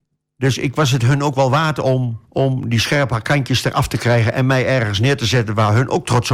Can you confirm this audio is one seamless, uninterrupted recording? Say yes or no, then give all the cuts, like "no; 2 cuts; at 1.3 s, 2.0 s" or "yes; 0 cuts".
no; 1 cut; at 2.2 s